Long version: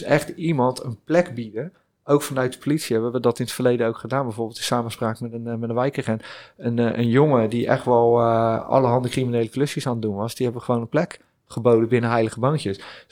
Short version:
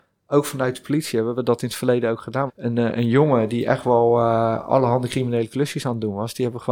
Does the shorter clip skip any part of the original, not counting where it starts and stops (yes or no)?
yes